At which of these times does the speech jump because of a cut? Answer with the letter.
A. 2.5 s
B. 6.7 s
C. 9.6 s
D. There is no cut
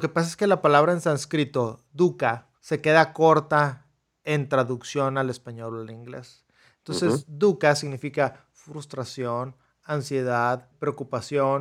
A